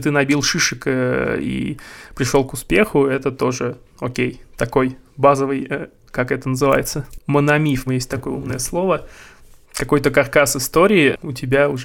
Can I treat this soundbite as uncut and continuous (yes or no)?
no